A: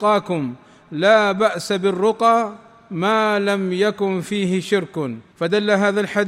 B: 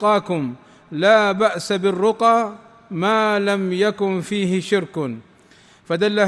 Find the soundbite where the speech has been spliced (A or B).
A